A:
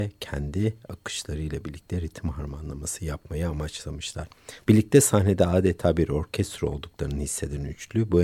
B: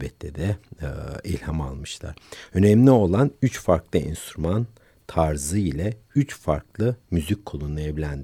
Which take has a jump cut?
A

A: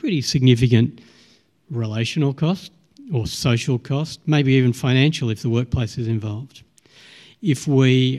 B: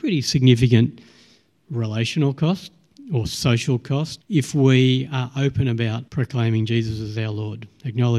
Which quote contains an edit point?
B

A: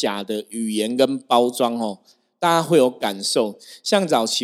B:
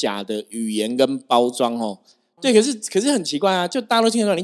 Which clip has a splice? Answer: B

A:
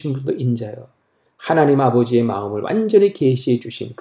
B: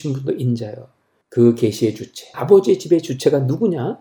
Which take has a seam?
B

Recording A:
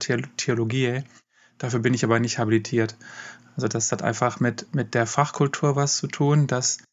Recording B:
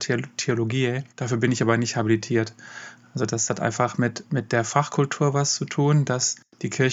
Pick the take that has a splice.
B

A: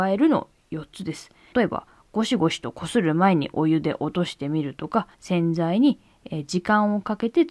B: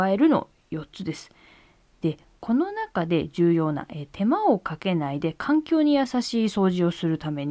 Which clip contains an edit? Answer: A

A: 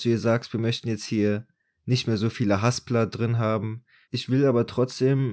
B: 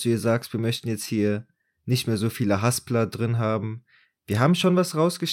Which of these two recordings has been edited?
A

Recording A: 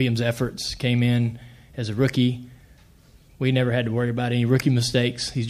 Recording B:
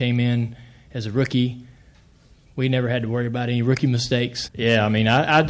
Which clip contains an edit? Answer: B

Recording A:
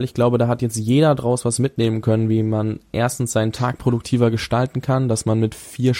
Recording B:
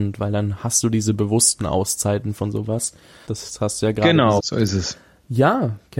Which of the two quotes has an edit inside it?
B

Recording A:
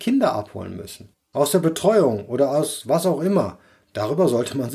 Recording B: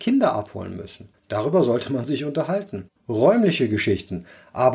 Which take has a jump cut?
B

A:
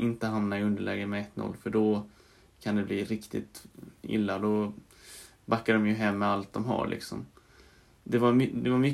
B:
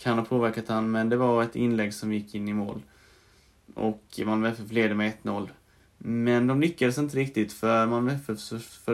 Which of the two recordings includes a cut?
B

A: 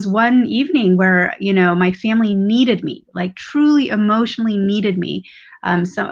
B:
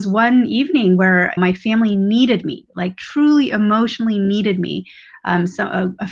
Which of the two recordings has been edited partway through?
B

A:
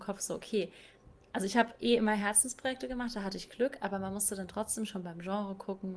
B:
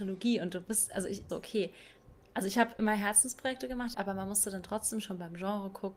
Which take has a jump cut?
B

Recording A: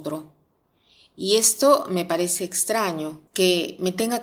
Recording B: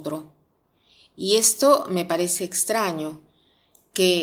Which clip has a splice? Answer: A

